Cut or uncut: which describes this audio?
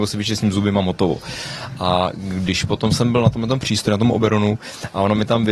uncut